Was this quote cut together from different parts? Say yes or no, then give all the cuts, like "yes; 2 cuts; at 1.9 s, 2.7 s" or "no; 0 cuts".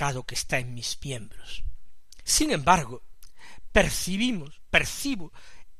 yes; 1 cut; at 2.3 s